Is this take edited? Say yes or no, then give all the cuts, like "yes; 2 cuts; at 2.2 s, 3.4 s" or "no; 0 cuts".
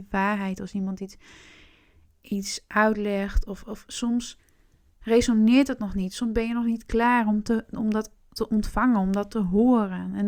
no; 0 cuts